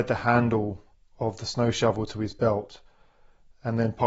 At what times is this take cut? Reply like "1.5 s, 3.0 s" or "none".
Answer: none